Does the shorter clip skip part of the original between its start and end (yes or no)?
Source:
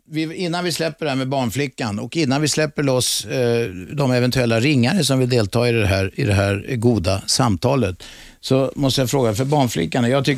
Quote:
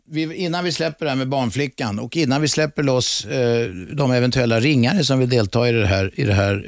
no